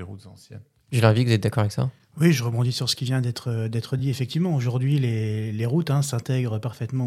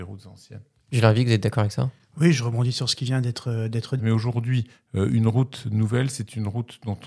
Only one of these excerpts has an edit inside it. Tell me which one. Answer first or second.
second